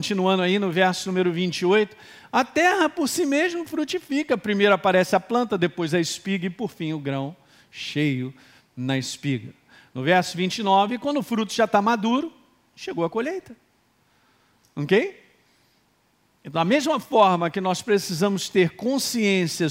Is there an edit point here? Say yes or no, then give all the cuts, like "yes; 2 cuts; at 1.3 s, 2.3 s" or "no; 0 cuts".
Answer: no; 0 cuts